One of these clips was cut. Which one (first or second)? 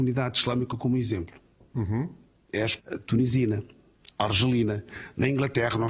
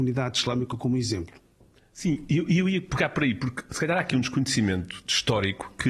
first